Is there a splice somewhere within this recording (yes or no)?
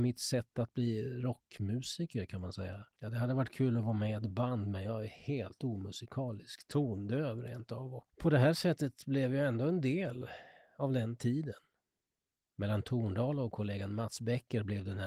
no